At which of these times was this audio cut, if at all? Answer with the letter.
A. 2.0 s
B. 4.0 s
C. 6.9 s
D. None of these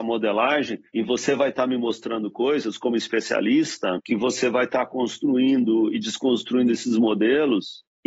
B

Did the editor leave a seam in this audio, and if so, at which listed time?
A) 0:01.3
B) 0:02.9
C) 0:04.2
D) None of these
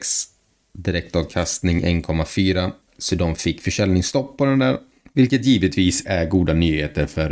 B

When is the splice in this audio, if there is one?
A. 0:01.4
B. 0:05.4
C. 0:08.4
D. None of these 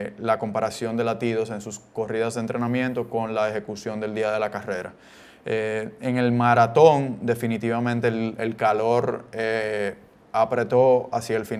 D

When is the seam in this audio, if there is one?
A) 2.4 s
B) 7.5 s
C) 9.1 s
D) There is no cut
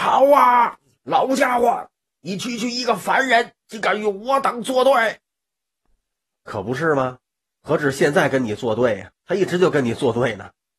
C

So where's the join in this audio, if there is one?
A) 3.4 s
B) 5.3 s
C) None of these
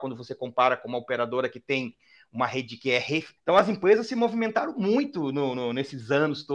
A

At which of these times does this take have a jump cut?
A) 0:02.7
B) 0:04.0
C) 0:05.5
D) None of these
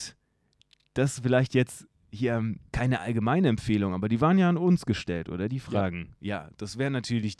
A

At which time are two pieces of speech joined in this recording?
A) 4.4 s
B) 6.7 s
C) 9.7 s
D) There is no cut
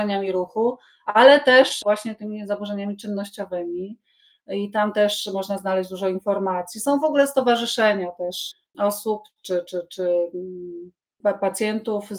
D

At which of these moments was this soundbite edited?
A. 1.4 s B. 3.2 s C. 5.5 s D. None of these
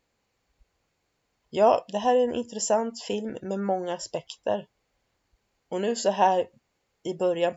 A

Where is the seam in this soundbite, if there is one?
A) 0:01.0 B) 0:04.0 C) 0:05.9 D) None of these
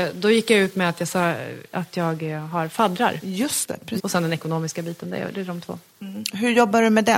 B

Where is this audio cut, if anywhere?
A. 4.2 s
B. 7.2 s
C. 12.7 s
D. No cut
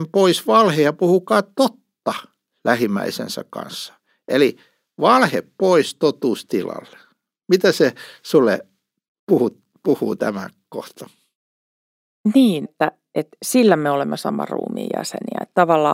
C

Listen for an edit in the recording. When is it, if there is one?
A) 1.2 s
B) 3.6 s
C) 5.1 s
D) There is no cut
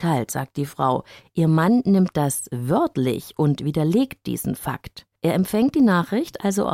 C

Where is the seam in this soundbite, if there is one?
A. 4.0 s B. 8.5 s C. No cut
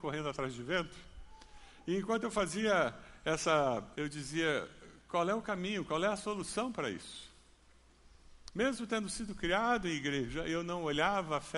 A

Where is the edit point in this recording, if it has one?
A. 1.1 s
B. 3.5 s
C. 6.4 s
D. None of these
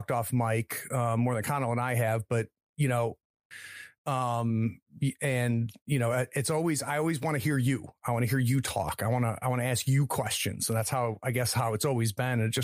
B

